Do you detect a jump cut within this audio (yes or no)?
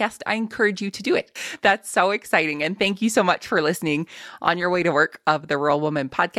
yes